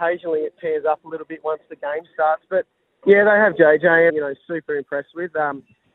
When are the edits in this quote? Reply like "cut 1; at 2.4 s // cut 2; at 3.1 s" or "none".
cut 1; at 3.0 s // cut 2; at 4.1 s